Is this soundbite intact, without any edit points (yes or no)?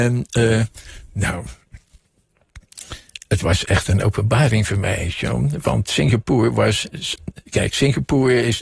yes